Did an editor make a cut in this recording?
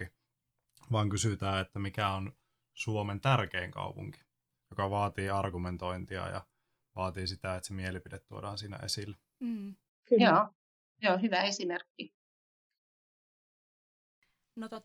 no; 0 cuts

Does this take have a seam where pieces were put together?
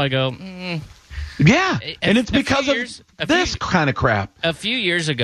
no; 0 cuts

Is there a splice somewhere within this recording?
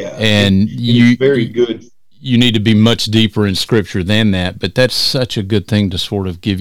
no; 0 cuts

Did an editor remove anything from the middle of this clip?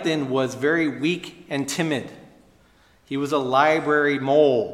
no; 0 cuts

